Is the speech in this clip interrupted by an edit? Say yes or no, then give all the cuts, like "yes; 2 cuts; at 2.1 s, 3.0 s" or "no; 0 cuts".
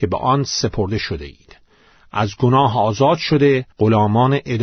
yes; 1 cut; at 3.7 s